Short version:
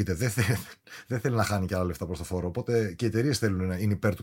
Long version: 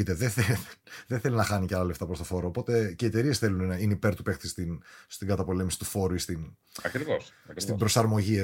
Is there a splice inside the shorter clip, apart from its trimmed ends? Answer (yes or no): no